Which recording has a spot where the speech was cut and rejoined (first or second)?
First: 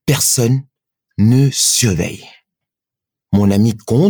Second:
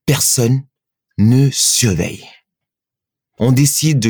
first